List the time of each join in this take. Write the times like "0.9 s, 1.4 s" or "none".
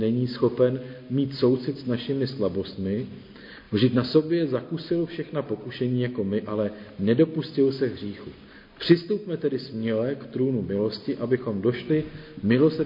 none